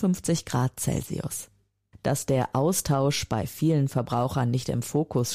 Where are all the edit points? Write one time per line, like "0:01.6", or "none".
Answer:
none